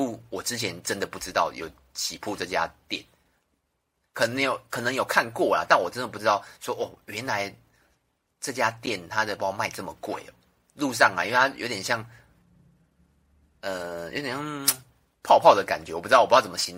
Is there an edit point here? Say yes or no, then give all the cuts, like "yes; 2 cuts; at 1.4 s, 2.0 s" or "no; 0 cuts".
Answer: yes; 1 cut; at 9.4 s